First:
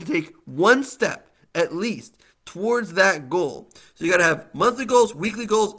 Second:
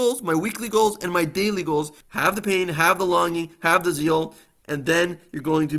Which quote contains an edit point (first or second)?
second